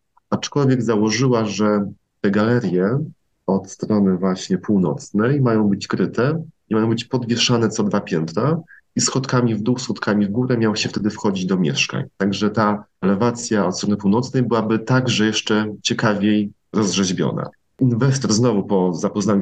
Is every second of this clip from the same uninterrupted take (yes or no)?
yes